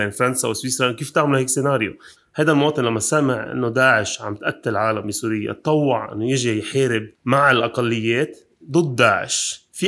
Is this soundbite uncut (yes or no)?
no